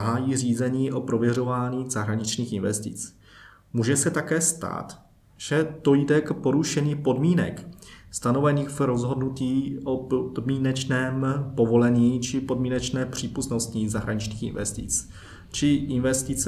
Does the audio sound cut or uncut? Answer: uncut